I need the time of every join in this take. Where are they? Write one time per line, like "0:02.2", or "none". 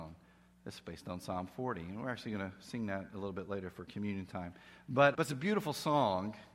0:05.1